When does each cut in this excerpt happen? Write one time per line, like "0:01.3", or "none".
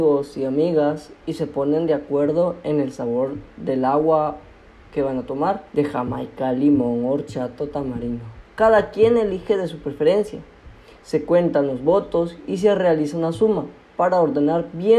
0:05.7

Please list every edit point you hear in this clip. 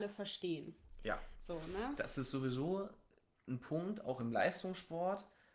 none

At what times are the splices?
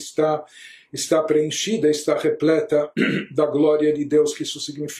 none

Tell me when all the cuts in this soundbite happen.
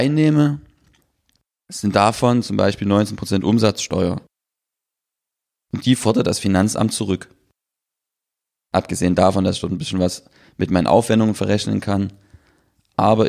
none

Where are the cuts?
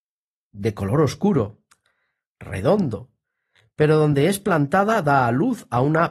none

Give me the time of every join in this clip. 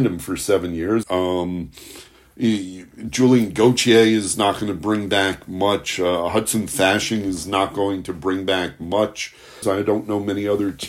0:01.0
0:09.6

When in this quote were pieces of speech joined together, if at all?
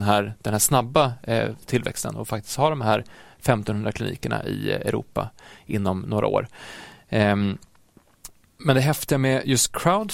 none

